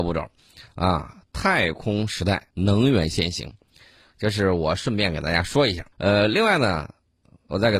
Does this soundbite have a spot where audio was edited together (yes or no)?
yes